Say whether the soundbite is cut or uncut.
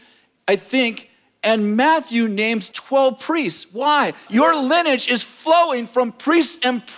cut